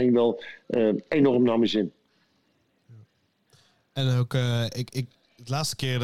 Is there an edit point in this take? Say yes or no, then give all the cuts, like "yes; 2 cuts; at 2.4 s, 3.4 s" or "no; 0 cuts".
no; 0 cuts